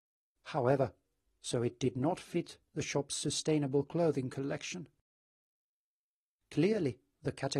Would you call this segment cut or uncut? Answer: cut